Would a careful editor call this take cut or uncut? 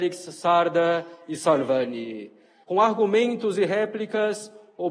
cut